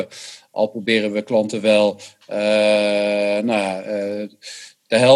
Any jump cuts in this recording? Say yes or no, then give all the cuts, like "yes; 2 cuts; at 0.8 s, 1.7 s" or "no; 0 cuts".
no; 0 cuts